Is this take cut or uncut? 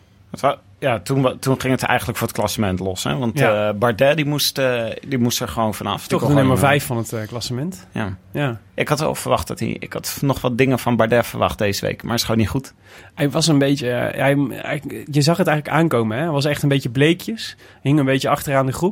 uncut